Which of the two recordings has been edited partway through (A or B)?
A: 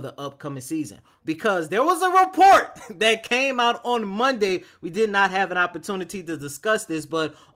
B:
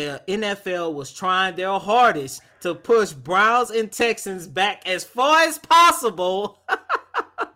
A